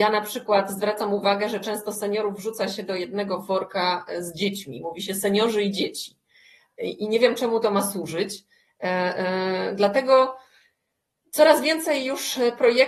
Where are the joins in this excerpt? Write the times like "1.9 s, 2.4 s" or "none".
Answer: none